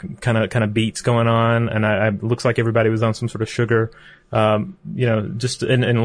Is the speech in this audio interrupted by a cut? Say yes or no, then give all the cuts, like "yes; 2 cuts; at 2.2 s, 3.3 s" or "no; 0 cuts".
no; 0 cuts